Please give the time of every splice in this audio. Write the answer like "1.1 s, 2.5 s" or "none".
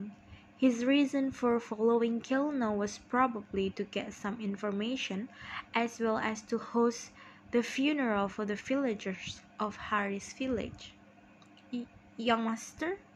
none